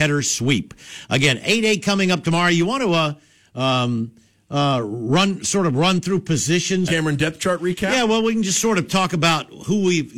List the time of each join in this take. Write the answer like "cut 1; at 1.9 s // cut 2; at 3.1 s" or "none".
cut 1; at 6.9 s